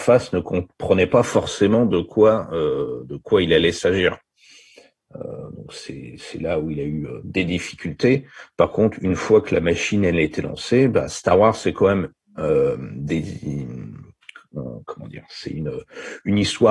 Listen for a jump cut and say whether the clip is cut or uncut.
uncut